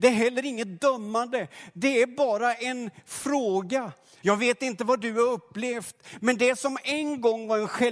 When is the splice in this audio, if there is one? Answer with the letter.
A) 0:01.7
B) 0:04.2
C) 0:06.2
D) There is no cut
B